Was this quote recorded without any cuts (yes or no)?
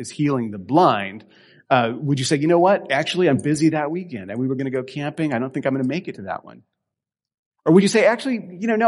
yes